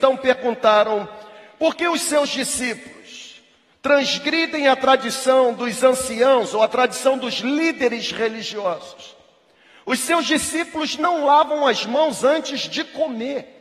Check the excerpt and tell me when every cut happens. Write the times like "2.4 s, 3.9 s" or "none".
none

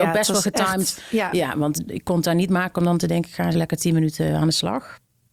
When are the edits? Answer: 1.8 s, 3.5 s

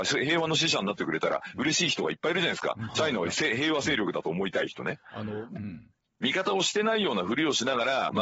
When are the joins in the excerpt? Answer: 5.6 s

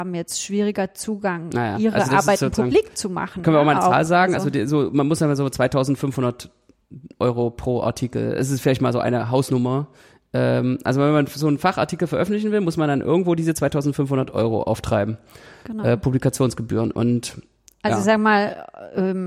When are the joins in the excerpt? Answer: none

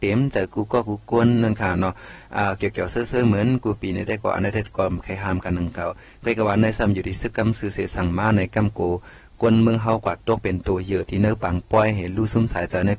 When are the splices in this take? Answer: none

